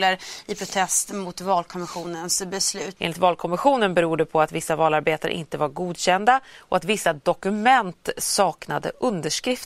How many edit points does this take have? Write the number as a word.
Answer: one